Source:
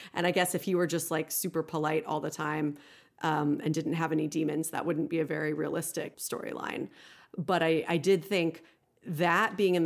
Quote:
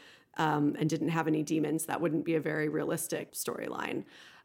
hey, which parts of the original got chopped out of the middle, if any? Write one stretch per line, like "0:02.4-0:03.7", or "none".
none

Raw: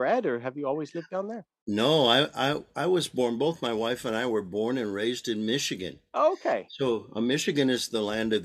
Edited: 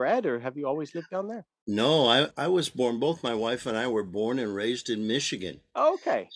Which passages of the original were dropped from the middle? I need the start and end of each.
0:02.3-0:02.7

